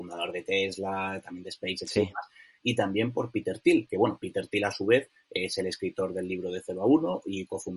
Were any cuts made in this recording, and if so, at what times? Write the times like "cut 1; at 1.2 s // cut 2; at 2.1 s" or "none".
none